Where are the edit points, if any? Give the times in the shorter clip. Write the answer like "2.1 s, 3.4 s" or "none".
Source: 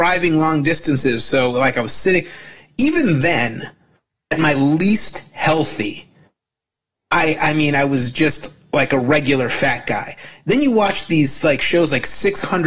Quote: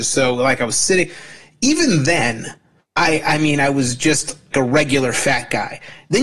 2.8 s, 4.5 s